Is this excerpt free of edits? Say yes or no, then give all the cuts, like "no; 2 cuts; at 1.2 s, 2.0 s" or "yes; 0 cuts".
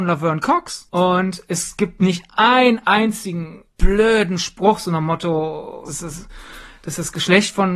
no; 1 cut; at 5.9 s